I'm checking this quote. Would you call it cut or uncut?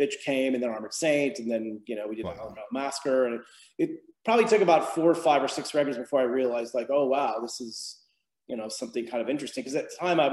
uncut